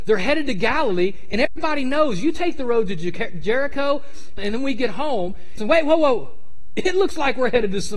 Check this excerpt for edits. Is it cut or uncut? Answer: cut